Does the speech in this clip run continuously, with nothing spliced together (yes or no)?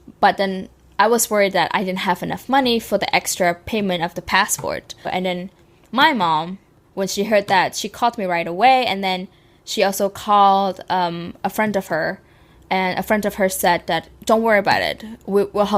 no